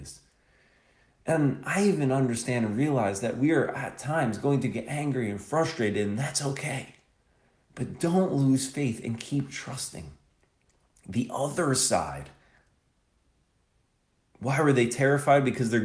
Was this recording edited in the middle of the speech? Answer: no; 0 cuts

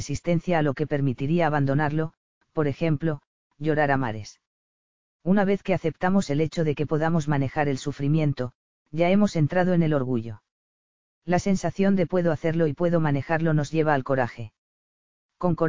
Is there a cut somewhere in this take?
no; 0 cuts

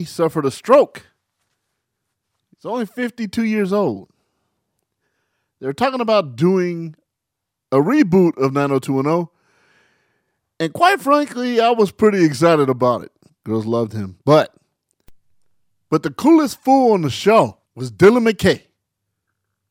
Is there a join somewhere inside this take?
yes; 2 cuts; at 13.3 s, 17.6 s

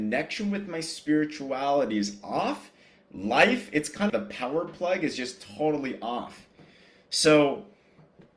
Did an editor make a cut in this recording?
yes; 1 cut; at 4.1 s

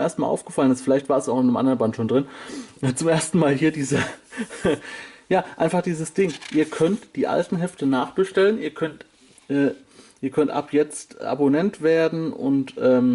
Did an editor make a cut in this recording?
no; 0 cuts

